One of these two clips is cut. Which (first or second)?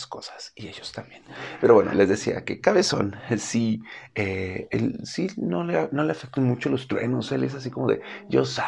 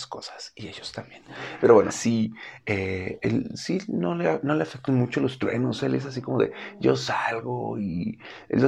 second